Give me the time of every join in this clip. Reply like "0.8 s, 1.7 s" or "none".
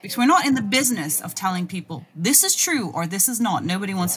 none